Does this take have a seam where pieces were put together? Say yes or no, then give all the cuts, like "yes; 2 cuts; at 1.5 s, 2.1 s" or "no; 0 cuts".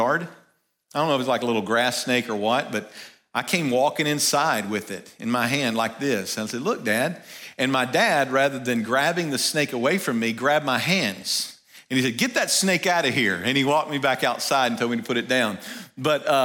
no; 0 cuts